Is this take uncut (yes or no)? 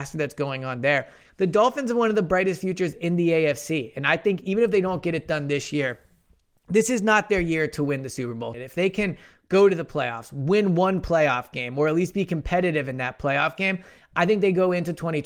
no